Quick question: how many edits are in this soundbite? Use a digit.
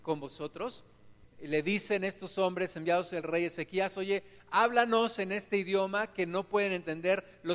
1